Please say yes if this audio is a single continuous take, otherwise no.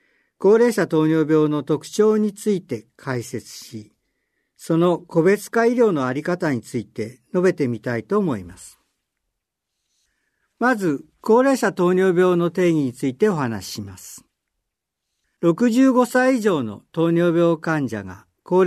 yes